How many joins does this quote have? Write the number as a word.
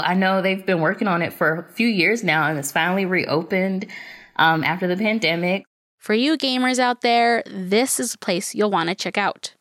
zero